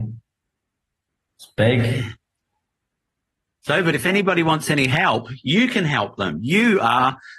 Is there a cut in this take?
no; 0 cuts

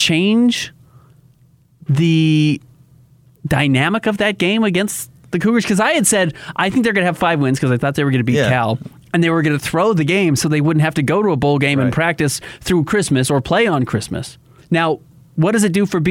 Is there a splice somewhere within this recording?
yes; 1 cut; at 14.6 s

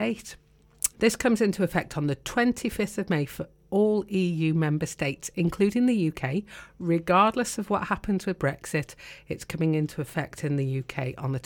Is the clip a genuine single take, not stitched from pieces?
no; 1 cut; at 0.9 s

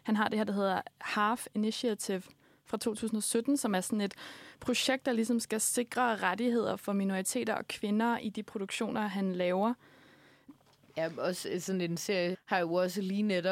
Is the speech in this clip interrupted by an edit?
yes; 2 cuts; at 10.5 s, 12.3 s

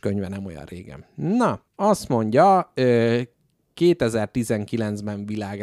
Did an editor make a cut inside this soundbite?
yes; 1 cut; at 1.7 s

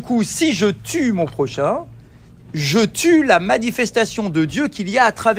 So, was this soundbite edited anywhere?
no; 0 cuts

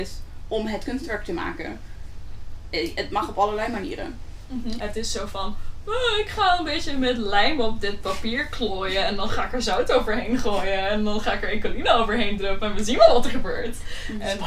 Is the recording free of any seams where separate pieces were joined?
no; 1 cut; at 4.8 s

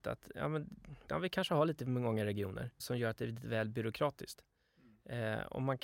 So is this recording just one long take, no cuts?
no; 2 cuts; at 1.1 s, 2.8 s

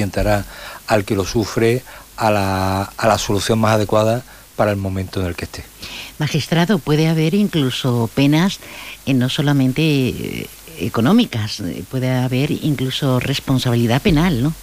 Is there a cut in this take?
no; 0 cuts

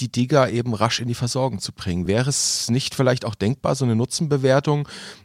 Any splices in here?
no; 0 cuts

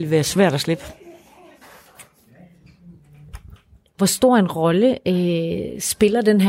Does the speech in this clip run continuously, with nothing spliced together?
no; 1 cut; at 3.9 s

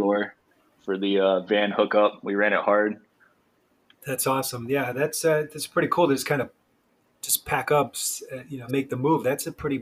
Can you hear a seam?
yes; 2 cuts; at 3.6 s, 8.7 s

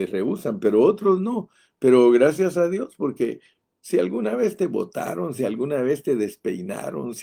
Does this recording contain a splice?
no; 0 cuts

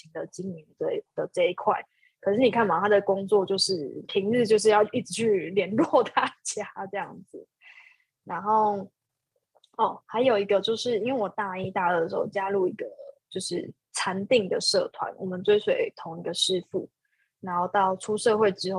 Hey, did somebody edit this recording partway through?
no; 0 cuts

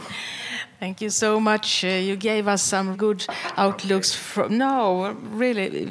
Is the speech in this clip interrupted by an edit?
yes; 1 cut; at 2.9 s

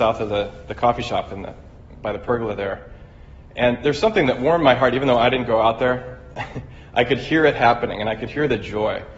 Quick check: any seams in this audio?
no; 0 cuts

